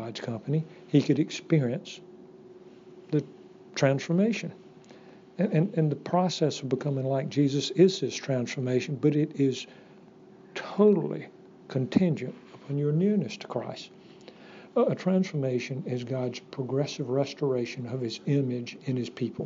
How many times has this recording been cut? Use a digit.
0